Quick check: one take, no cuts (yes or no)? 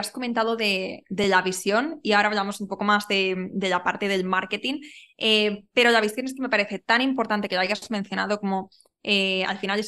yes